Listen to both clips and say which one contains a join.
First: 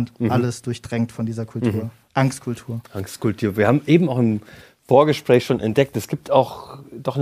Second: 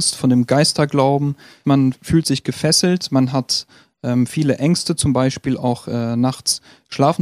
second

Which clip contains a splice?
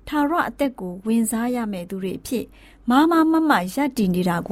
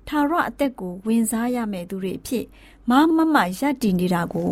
second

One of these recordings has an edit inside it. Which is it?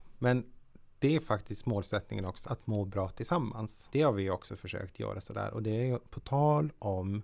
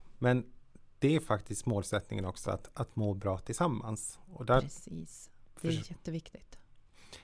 first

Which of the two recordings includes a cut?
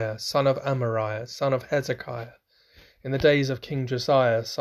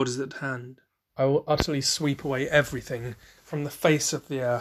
second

